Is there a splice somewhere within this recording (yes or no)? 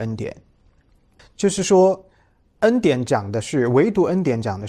yes